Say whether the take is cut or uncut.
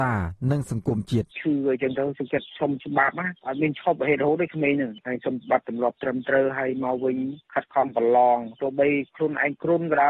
cut